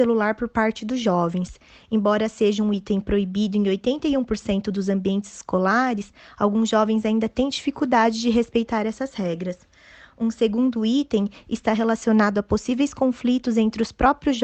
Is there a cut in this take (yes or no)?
no